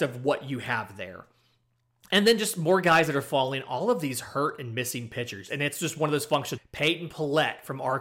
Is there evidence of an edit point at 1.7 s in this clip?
no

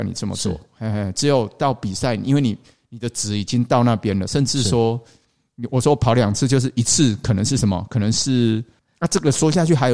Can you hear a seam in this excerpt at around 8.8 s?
yes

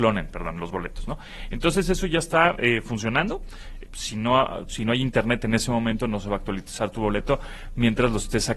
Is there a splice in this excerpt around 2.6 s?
no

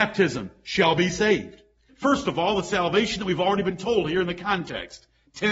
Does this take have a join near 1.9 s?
yes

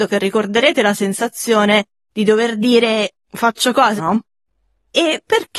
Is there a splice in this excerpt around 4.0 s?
yes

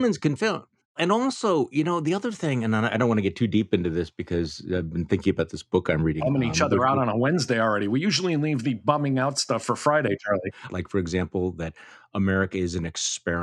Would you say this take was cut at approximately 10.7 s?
yes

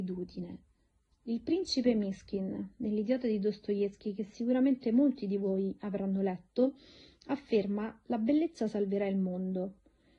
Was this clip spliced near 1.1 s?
yes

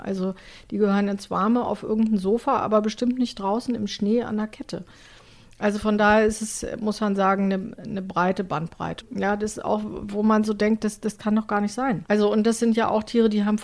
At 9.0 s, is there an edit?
yes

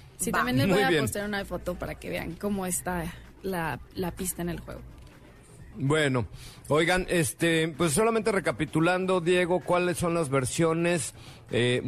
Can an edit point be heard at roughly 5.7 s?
yes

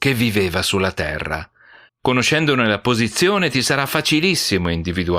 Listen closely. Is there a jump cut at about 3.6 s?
no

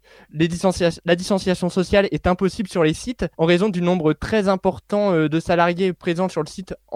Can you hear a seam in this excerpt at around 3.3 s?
yes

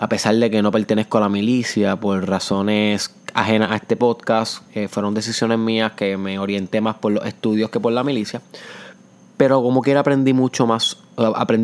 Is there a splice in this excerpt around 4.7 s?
yes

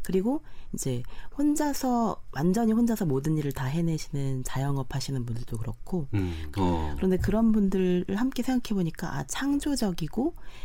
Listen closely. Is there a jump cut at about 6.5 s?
yes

